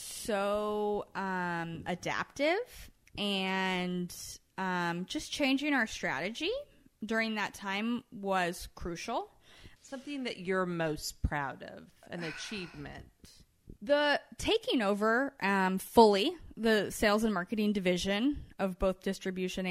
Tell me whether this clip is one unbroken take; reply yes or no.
no